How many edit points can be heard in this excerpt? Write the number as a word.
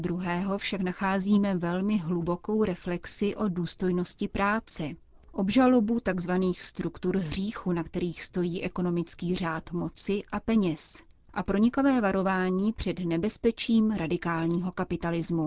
zero